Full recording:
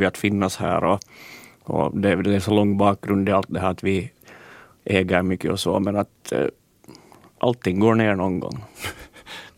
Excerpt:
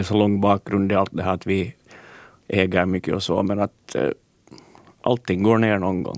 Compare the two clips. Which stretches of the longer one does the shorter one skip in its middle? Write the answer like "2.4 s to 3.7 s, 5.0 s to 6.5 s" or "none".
none